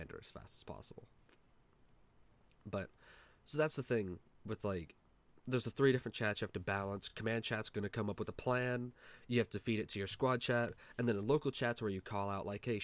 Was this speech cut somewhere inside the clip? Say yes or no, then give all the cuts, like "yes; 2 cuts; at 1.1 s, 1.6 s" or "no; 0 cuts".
no; 0 cuts